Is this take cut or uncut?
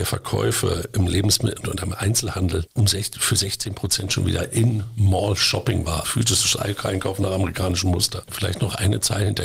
cut